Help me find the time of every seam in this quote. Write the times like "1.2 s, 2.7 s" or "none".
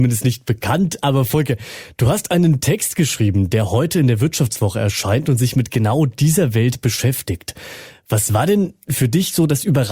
none